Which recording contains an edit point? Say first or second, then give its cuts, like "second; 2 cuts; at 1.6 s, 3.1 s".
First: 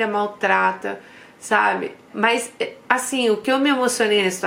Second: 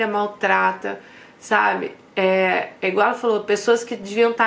first; 1 cut; at 2.1 s